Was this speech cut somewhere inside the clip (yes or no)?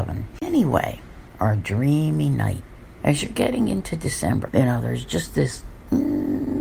yes